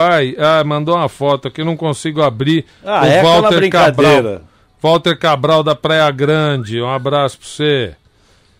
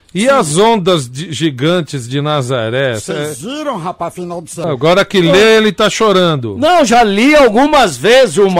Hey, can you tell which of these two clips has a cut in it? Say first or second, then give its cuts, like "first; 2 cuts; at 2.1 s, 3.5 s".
second; 1 cut; at 4.6 s